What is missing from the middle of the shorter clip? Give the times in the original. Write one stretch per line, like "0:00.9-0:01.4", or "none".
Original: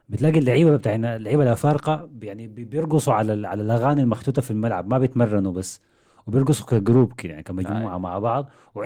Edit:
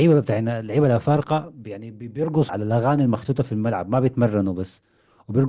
0:03.1-0:03.5